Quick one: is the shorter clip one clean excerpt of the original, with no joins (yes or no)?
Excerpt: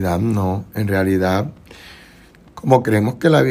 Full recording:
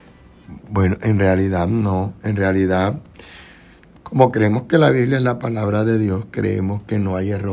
yes